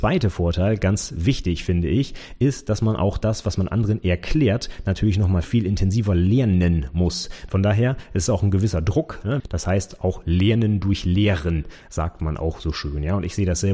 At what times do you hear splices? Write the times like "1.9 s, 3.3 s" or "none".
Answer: 5.4 s, 7.5 s, 9.4 s